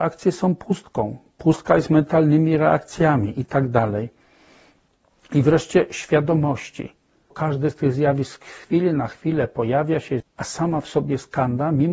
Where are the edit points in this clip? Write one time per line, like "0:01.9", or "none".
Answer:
0:07.3
0:10.2